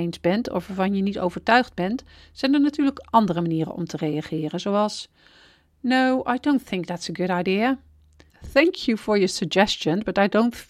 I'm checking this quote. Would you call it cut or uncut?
uncut